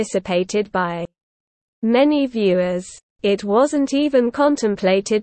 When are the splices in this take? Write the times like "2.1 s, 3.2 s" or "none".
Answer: 3.1 s